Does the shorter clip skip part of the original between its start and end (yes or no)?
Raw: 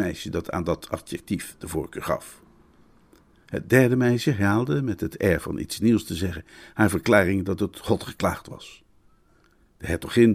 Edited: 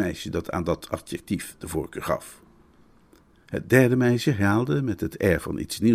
no